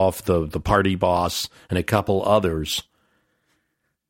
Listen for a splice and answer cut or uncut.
uncut